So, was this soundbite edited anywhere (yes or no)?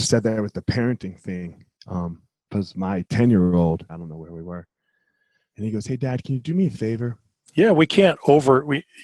yes